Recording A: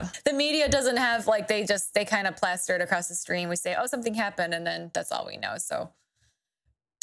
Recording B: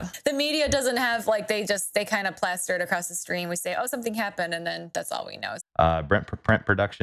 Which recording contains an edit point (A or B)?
B